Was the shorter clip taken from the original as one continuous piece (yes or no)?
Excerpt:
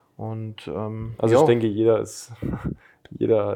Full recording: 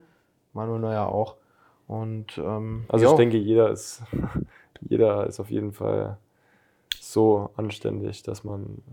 yes